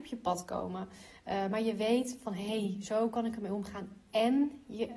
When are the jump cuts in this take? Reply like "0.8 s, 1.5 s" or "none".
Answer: none